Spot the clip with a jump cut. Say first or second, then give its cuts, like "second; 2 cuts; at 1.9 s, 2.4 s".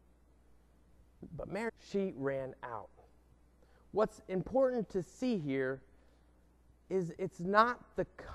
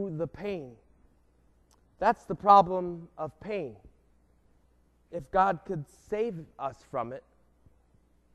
first; 1 cut; at 1.7 s